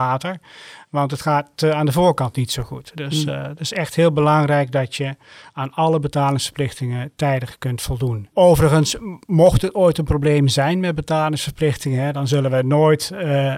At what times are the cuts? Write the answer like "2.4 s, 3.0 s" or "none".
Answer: 8.3 s